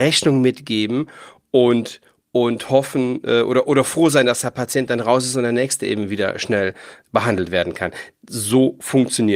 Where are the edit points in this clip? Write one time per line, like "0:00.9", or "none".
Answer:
0:07.0